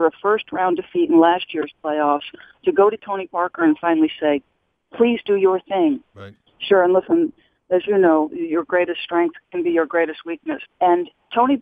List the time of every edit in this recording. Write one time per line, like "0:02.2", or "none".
0:06.5
0:10.7